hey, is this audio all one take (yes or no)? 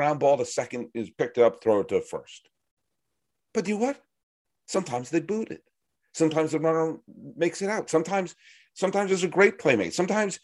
yes